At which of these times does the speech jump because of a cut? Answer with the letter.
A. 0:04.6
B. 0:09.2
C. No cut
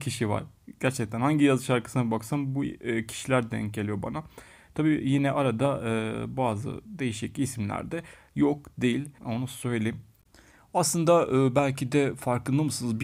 B